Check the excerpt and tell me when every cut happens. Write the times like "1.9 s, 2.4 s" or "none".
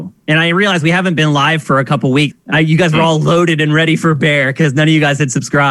2.3 s